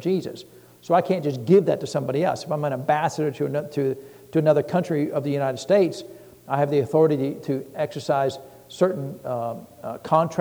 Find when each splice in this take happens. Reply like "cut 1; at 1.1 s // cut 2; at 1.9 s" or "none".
none